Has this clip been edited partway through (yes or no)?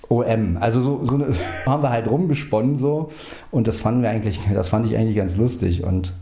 yes